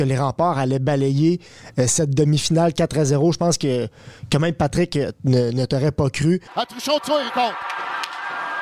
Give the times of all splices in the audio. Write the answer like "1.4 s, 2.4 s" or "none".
6.5 s